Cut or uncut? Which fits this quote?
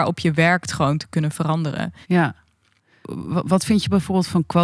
cut